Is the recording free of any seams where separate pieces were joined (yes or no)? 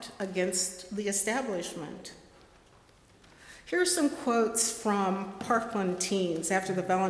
yes